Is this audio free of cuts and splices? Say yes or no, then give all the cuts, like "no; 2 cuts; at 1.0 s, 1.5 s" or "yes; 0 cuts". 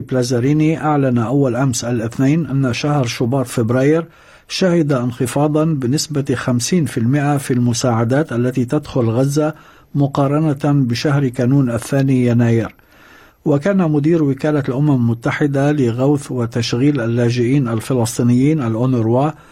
no; 1 cut; at 13.3 s